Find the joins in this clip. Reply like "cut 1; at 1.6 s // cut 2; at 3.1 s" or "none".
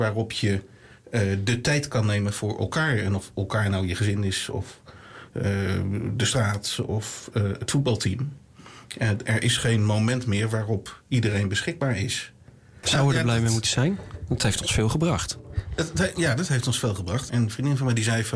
cut 1; at 12.8 s // cut 2; at 17.3 s

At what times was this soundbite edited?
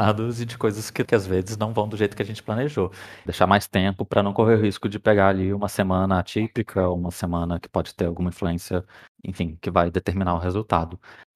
cut 1; at 1.0 s // cut 2; at 3.3 s

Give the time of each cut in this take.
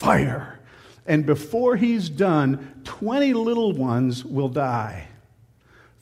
none

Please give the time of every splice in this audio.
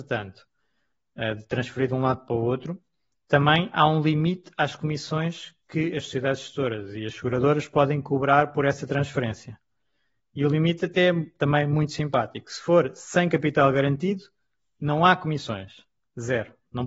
none

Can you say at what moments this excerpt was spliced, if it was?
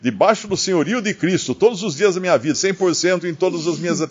cut 1; at 2.5 s

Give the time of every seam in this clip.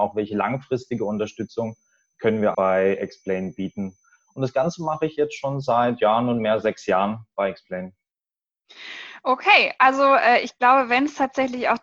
cut 1; at 2.5 s

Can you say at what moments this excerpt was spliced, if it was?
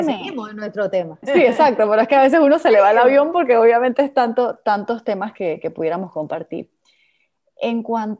cut 1; at 1.2 s

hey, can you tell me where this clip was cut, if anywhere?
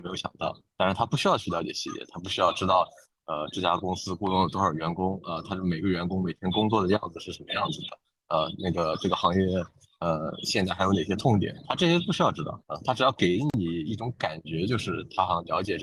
cut 1; at 12.6 s

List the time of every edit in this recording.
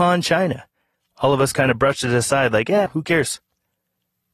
cut 1; at 2.9 s

